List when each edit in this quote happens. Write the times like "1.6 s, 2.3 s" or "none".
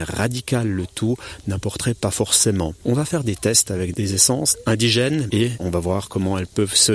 2.8 s, 5.3 s